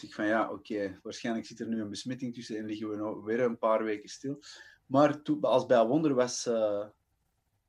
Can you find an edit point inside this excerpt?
no; 0 cuts

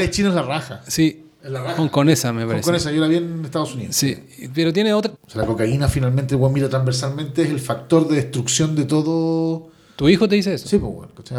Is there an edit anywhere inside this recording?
yes; 1 cut; at 5.2 s

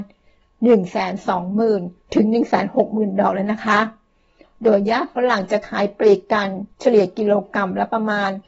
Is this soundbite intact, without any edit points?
yes; 0 cuts

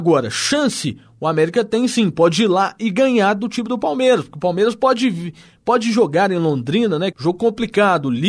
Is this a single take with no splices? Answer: no; 1 cut; at 7.1 s

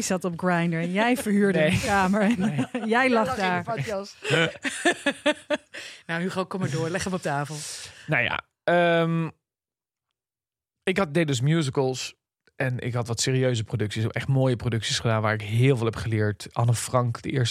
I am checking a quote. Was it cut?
no; 0 cuts

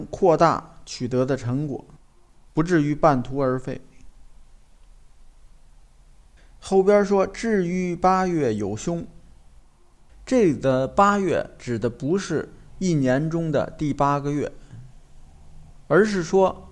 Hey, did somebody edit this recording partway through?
no; 0 cuts

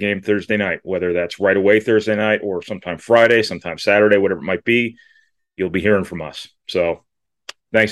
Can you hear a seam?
no; 0 cuts

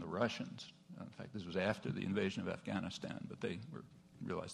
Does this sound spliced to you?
no; 0 cuts

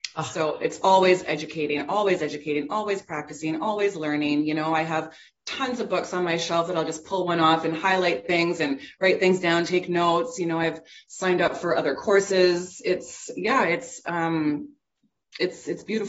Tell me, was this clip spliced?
no; 0 cuts

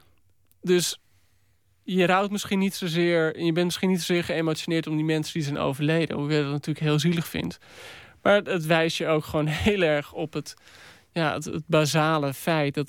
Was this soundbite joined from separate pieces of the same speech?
no; 0 cuts

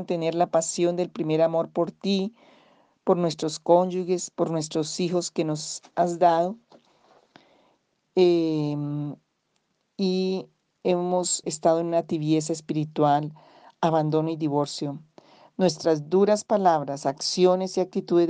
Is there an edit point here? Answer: yes; 1 cut; at 11.4 s

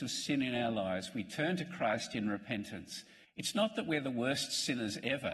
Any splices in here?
yes; 1 cut; at 3.2 s

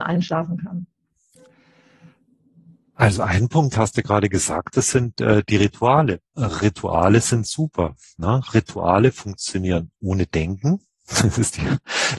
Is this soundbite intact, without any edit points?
yes; 0 cuts

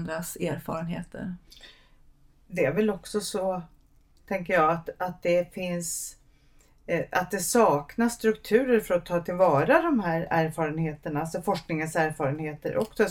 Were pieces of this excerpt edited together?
no; 0 cuts

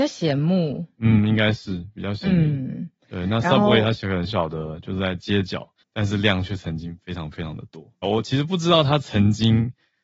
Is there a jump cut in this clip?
yes; 2 cuts; at 4.3 s, 8.0 s

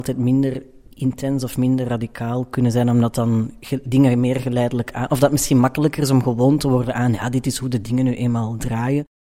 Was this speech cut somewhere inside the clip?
no; 0 cuts

